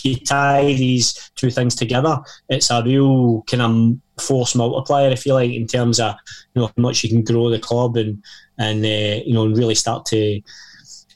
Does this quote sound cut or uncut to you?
uncut